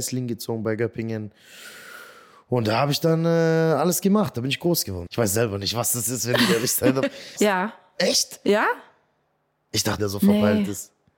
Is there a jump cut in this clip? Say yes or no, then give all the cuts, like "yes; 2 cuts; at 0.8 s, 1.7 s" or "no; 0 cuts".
yes; 3 cuts; at 5.1 s, 7.4 s, 10.0 s